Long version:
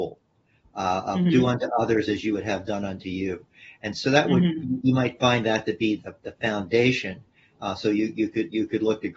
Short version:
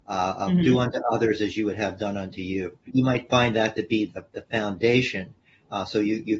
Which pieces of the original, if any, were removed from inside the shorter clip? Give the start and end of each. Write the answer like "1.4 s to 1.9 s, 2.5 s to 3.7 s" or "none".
3.5 s to 4.8 s